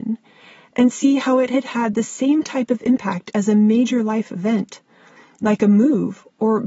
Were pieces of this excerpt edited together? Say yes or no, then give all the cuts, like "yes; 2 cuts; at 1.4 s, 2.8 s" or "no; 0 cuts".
no; 0 cuts